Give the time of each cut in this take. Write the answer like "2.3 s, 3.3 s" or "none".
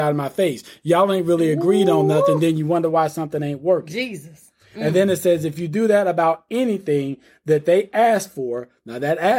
none